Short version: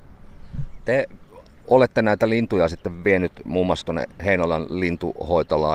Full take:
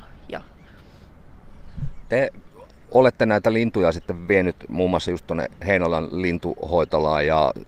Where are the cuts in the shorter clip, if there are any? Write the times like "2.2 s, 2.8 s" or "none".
3.8 s